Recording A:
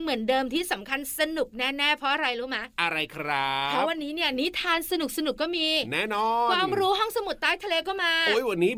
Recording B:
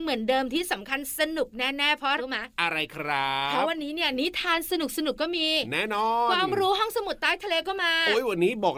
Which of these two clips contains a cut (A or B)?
B